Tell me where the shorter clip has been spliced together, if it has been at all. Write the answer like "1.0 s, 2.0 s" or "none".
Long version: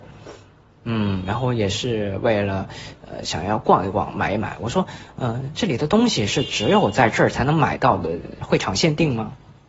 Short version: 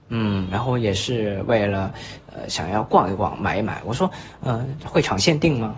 4.8 s